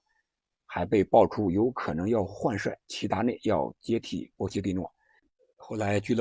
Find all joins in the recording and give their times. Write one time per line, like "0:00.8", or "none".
none